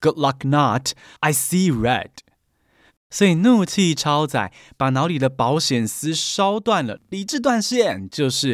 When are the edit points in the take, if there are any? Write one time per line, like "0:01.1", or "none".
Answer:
0:02.9